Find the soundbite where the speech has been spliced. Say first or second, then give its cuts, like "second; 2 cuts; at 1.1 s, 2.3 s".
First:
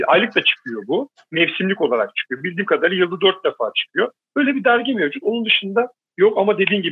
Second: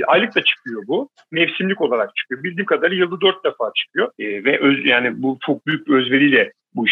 second; 1 cut; at 4.2 s